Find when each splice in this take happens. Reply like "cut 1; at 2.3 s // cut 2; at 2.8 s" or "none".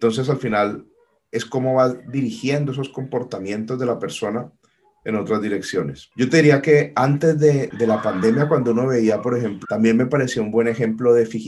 cut 1; at 9.6 s